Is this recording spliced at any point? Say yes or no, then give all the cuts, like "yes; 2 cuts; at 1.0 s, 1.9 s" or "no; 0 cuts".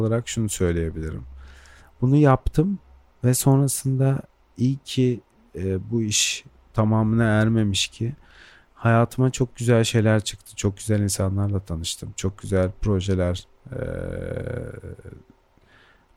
no; 0 cuts